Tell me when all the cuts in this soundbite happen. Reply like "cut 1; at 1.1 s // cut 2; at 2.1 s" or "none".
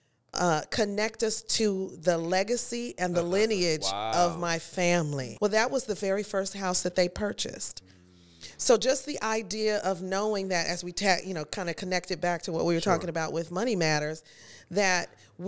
cut 1; at 5.4 s